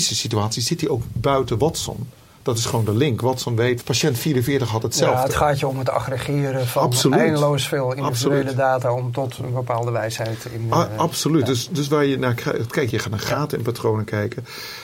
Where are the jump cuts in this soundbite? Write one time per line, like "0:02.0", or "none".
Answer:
0:03.8
0:12.9